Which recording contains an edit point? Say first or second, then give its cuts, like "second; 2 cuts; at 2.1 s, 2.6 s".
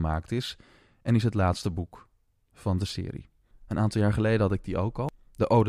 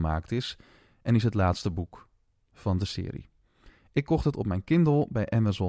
first; 1 cut; at 3.5 s